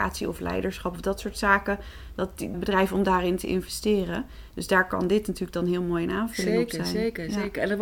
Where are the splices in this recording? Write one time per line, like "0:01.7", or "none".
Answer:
0:02.5